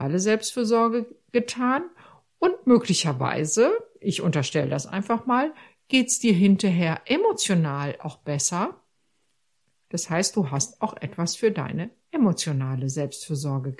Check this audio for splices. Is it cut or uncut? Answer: uncut